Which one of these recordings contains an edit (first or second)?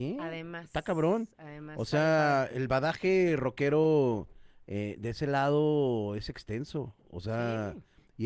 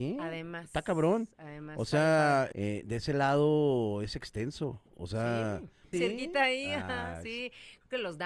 second